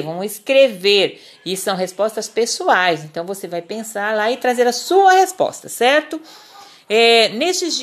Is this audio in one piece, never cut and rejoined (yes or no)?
yes